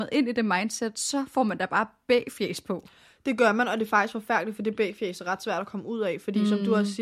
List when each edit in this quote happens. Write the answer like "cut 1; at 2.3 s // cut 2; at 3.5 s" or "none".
none